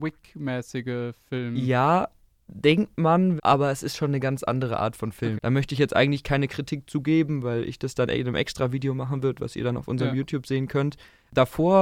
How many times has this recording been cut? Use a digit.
2